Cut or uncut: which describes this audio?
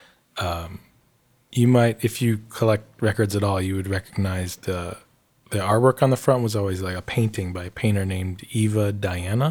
uncut